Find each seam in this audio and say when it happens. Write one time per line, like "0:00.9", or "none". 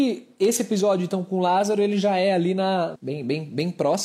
0:02.9